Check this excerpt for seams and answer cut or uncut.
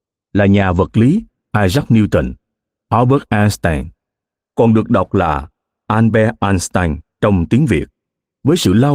uncut